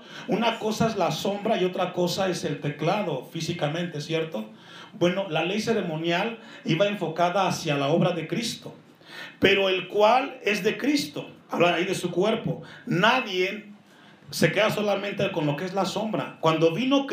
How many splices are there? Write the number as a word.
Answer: one